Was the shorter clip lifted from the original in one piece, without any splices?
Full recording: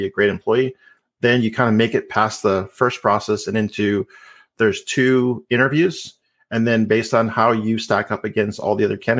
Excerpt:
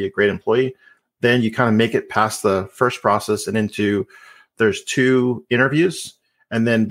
yes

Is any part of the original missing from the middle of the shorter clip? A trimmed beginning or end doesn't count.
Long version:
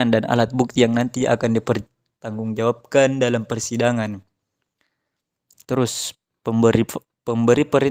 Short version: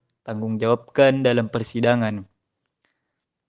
no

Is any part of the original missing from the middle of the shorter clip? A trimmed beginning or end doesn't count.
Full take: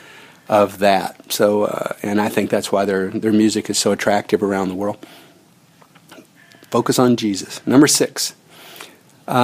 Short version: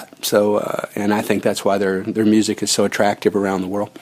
no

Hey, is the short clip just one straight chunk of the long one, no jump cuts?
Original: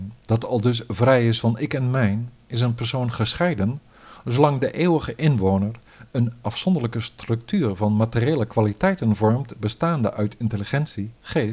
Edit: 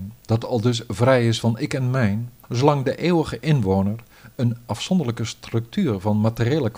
no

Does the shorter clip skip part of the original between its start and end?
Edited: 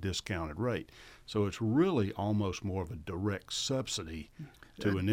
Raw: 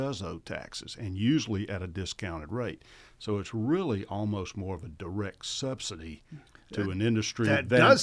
no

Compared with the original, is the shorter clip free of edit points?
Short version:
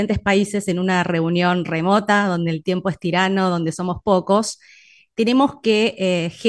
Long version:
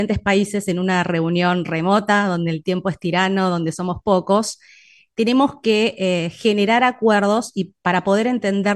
yes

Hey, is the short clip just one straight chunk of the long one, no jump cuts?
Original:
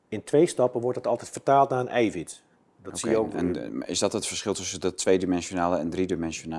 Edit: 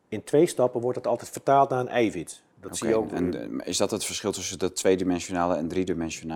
no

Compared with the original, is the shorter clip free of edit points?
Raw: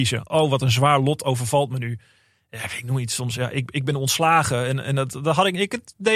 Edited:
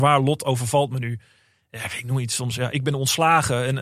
no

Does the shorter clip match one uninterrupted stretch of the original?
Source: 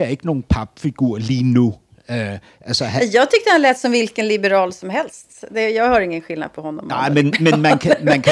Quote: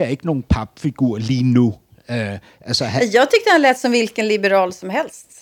yes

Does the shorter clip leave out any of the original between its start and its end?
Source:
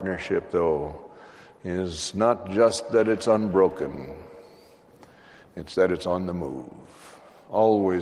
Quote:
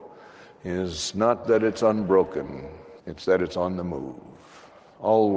yes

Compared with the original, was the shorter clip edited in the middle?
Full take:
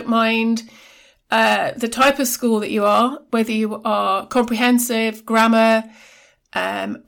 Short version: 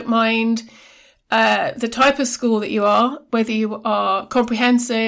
no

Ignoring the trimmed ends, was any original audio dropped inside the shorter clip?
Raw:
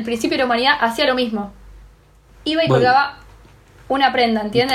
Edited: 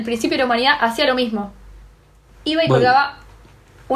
no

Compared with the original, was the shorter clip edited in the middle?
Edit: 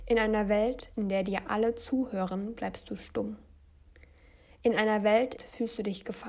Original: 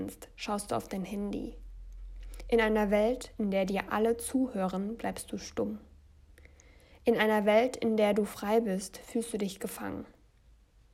yes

